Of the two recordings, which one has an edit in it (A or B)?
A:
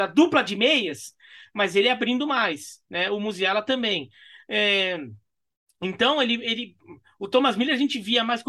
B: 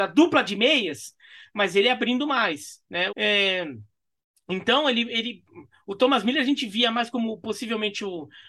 B